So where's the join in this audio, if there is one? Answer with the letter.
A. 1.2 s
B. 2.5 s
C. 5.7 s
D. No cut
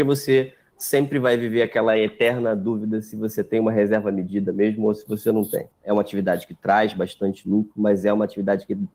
C